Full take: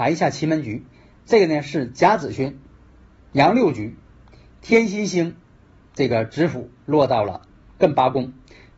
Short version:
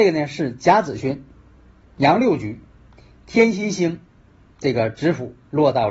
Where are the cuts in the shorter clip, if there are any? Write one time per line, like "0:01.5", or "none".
none